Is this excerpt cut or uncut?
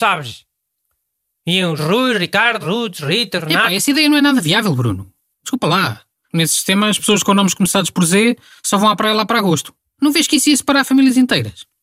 cut